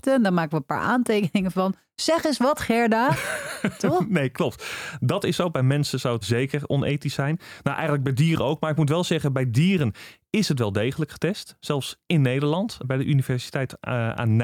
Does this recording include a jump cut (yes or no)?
yes